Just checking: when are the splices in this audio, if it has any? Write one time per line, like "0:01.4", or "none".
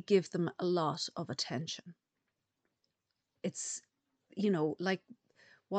0:03.4